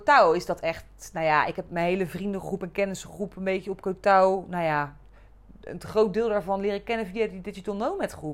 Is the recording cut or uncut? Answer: uncut